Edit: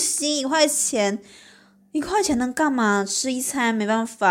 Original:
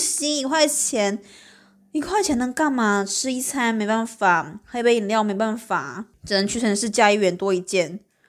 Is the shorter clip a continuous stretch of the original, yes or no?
yes